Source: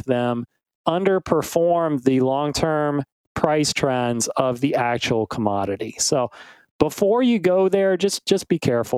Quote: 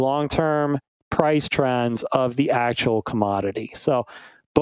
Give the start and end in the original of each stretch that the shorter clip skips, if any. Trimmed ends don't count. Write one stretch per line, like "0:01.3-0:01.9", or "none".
none